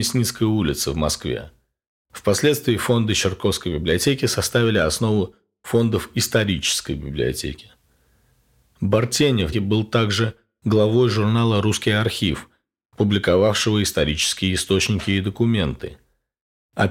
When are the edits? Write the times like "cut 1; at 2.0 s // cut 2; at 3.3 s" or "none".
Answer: cut 1; at 9.5 s